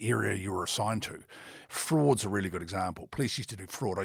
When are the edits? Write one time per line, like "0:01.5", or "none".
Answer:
0:01.6